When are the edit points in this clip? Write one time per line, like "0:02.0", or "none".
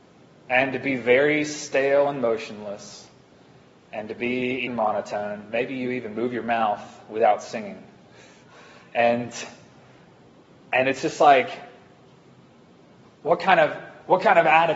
0:04.7

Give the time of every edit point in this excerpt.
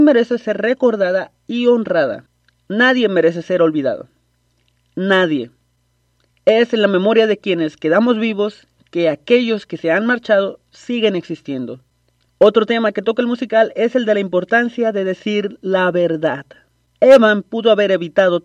0:12.2

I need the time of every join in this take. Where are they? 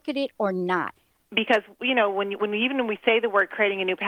0:01.2

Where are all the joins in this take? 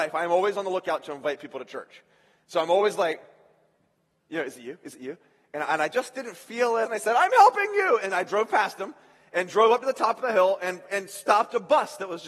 0:06.8

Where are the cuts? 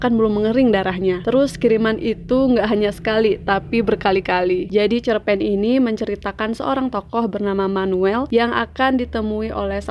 0:04.7

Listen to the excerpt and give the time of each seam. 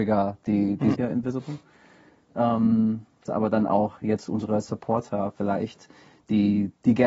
0:00.9
0:03.3

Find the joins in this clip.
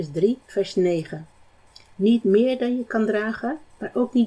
0:01.9

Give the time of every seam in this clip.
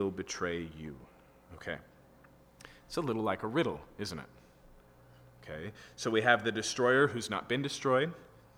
none

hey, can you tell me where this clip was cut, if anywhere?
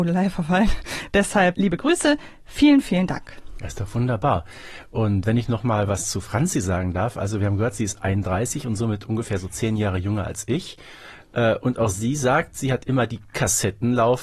0:01.5

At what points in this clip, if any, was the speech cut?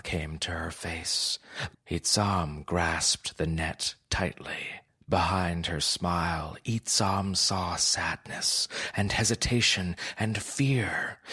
0:01.7

